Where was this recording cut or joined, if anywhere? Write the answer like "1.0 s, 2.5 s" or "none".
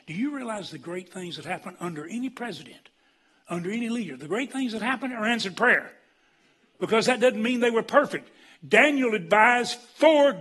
6.7 s